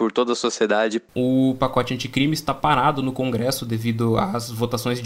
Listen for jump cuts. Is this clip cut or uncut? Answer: uncut